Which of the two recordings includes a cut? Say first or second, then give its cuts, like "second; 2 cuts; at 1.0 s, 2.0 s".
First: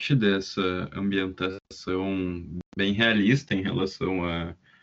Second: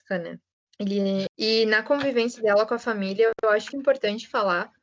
second; 2 cuts; at 1.3 s, 3.7 s